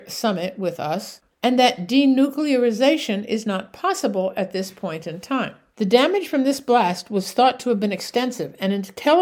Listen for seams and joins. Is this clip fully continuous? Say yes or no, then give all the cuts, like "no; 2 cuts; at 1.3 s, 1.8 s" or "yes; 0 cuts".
no; 1 cut; at 5.7 s